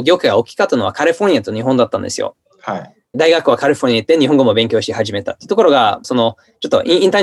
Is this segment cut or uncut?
cut